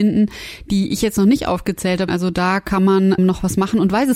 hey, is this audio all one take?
no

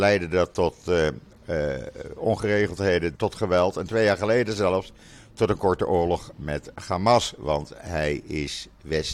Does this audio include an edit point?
yes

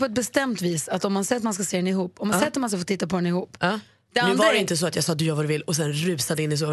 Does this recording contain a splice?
yes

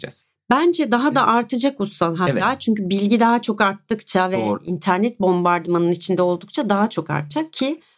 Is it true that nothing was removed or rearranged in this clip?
yes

